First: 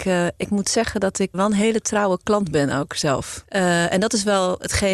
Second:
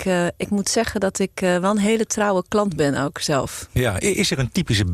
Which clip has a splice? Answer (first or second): first